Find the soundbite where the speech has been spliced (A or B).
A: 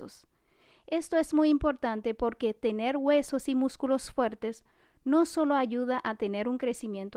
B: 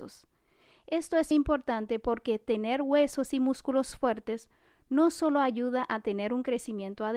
B